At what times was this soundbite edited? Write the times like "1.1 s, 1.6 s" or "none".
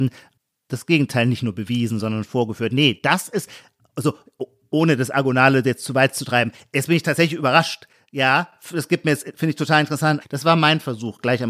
10.2 s